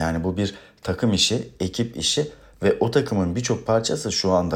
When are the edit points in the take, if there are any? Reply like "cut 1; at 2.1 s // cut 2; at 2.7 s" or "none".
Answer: none